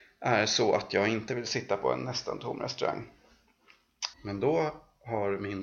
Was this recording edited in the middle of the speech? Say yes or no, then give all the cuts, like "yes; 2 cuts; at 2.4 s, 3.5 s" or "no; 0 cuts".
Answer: yes; 1 cut; at 4.1 s